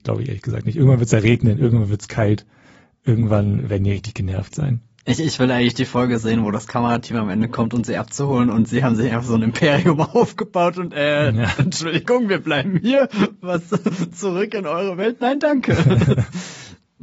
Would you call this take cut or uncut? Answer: uncut